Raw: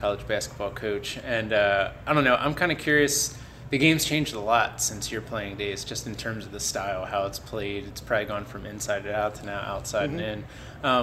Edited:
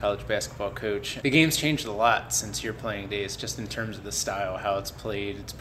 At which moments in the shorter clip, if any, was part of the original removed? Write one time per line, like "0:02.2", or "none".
0:01.2